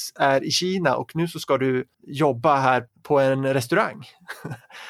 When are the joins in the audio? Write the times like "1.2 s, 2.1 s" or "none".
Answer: 1.9 s